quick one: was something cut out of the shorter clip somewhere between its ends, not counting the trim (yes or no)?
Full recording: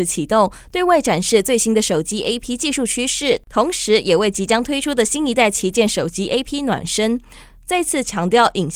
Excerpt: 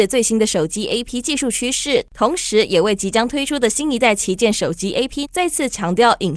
yes